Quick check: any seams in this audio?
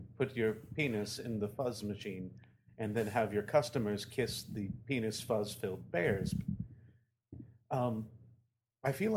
no; 0 cuts

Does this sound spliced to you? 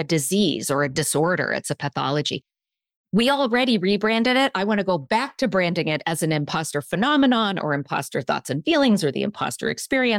no; 0 cuts

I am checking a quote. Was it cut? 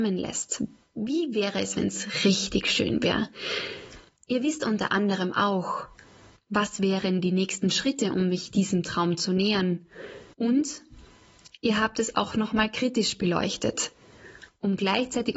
yes; 1 cut; at 10.3 s

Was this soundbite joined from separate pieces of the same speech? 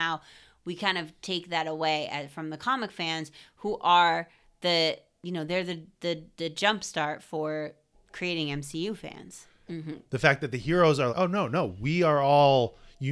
yes; 2 cuts; at 9.7 s, 11.1 s

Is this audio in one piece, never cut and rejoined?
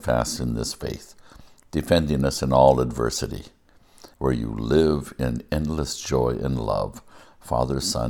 no; 1 cut; at 4.1 s

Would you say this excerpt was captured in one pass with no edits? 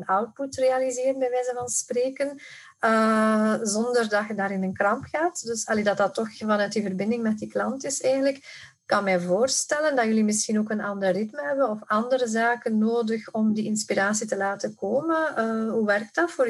yes; 0 cuts

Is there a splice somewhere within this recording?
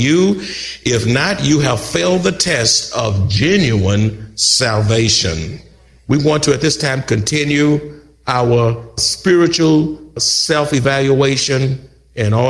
no; 0 cuts

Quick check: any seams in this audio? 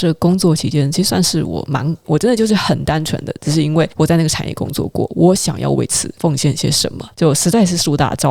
yes; 2 cuts; at 2.0 s, 7.1 s

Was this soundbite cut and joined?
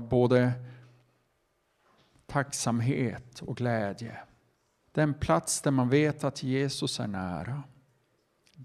yes; 1 cut; at 4.8 s

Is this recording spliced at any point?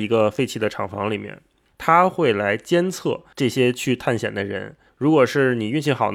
yes; 1 cut; at 4.9 s

